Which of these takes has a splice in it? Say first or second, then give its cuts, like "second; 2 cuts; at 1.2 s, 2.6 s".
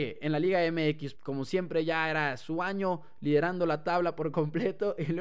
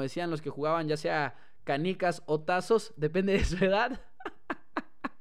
first; 1 cut; at 1.1 s